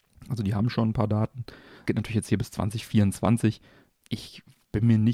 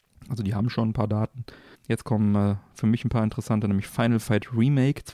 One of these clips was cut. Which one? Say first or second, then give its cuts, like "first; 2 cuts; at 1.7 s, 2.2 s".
second; 1 cut; at 1.7 s